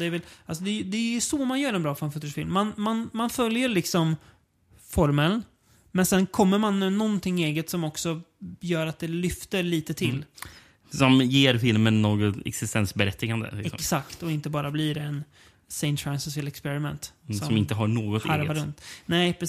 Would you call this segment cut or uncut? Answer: uncut